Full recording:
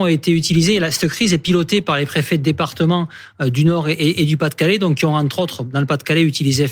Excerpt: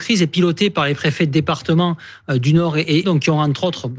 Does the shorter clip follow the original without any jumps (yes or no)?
no